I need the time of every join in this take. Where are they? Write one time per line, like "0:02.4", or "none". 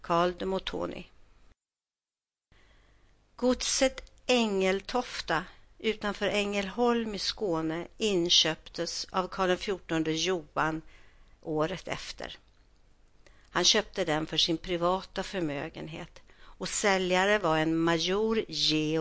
none